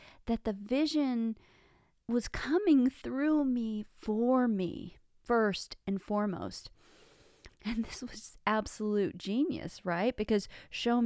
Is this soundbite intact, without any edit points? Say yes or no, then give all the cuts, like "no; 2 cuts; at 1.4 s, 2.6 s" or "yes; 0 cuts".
no; 1 cut; at 7.5 s